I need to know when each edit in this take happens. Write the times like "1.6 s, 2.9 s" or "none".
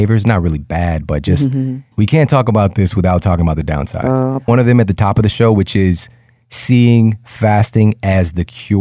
1.9 s, 4.5 s